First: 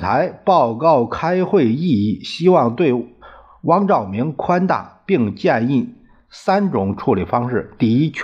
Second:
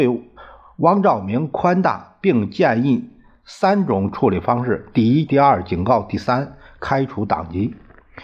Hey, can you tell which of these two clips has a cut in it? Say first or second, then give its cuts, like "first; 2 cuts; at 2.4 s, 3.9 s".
second; 1 cut; at 5.3 s